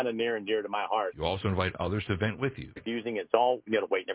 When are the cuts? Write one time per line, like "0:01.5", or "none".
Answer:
0:01.1
0:02.8